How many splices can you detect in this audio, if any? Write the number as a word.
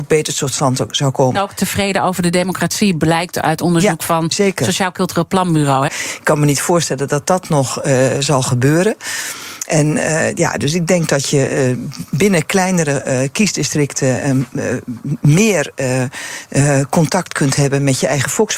two